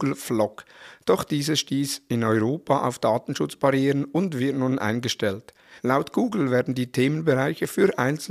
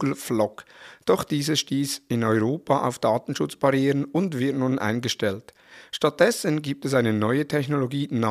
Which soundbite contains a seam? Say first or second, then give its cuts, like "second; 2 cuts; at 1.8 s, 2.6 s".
first; 1 cut; at 5.8 s